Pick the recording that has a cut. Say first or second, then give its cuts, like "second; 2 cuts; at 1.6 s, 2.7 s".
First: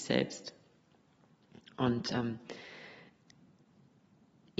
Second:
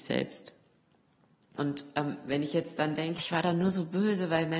second; 2 cuts; at 1.6 s, 3.2 s